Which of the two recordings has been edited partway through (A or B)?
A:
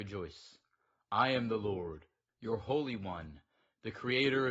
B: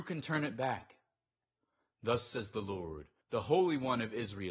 B